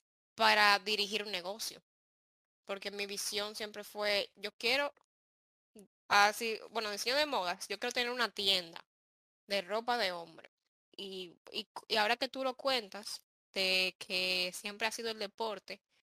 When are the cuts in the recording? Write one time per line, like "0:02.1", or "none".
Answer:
0:05.9
0:10.9